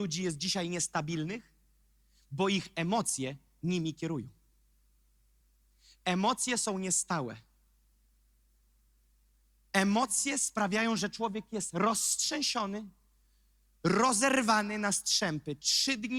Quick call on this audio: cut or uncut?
uncut